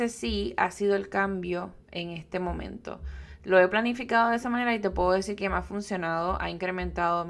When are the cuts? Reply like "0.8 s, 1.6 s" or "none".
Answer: 1.8 s